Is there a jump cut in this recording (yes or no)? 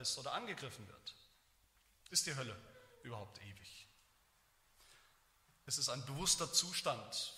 yes